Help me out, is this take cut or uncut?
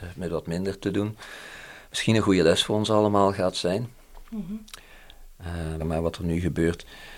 cut